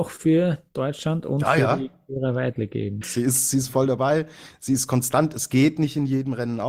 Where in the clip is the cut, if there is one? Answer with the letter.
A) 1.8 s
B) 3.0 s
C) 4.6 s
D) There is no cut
B